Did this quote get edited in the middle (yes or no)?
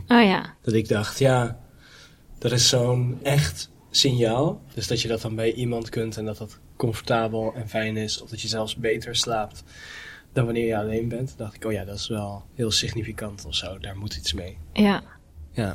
no